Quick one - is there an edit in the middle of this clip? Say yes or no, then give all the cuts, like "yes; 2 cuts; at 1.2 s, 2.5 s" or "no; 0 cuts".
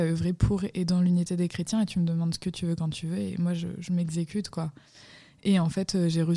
no; 0 cuts